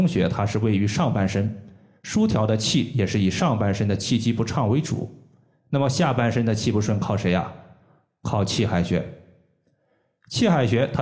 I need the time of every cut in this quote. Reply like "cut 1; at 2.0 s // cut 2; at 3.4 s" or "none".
none